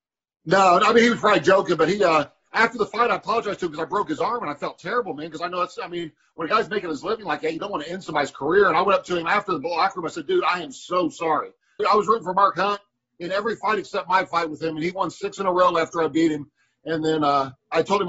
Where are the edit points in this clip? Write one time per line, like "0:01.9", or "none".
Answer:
0:11.8